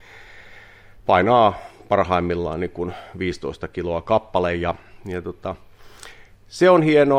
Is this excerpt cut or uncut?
uncut